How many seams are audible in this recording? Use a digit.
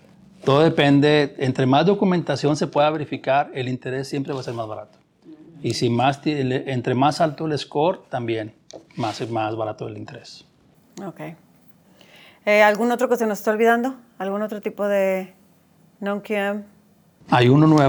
0